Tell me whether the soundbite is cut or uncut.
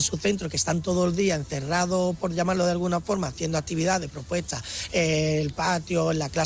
uncut